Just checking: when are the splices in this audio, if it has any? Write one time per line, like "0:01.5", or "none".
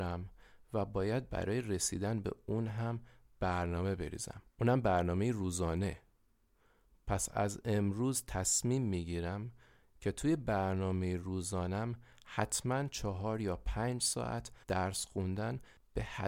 0:04.5
0:14.6